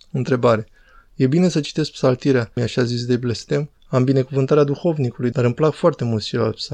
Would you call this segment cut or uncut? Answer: cut